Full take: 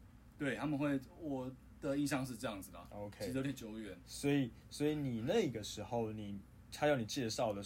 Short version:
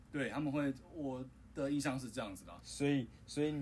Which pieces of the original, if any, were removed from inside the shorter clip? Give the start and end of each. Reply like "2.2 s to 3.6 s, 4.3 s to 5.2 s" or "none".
2.9 s to 4.0 s